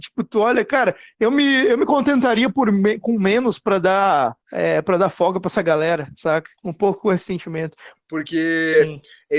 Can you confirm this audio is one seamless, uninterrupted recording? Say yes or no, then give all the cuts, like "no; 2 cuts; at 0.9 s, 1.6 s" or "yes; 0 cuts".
no; 3 cuts; at 4.4 s, 6.6 s, 7.9 s